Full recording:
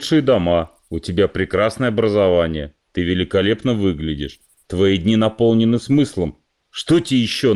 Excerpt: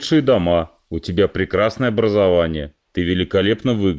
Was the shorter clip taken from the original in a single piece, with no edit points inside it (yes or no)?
yes